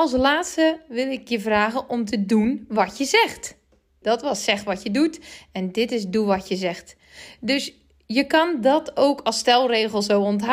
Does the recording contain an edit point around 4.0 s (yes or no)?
yes